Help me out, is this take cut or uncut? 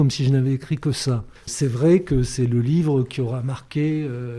uncut